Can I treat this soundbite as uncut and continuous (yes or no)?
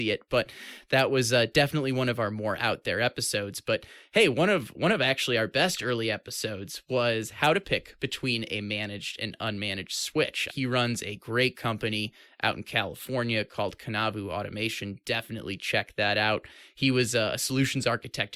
no